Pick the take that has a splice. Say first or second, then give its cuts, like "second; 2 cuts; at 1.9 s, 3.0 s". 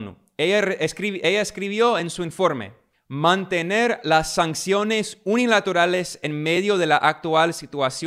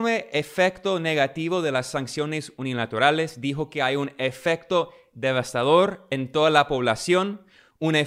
first; 1 cut; at 2.9 s